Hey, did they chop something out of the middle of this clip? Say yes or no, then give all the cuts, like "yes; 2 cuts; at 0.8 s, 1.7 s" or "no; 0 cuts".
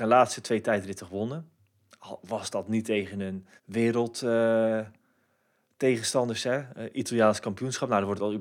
yes; 1 cut; at 3.6 s